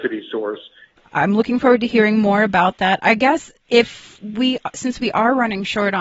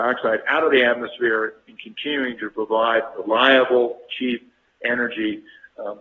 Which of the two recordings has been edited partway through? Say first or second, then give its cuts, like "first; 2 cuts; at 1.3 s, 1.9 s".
first; 1 cut; at 1.0 s